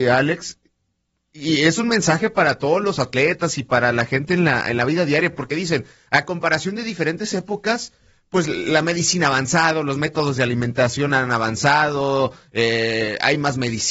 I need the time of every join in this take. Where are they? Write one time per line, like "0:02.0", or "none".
none